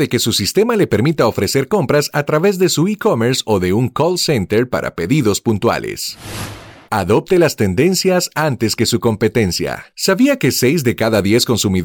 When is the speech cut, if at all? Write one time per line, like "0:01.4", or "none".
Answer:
0:06.9
0:09.9